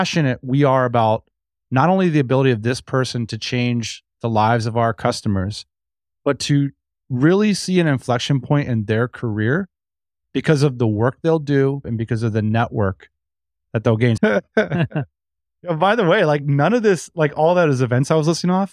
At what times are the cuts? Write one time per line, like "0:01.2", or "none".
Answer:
0:11.8
0:14.2